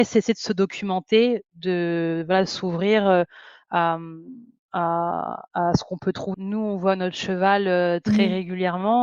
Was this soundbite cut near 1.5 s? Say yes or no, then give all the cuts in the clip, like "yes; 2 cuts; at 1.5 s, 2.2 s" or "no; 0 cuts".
no; 1 cut; at 6.3 s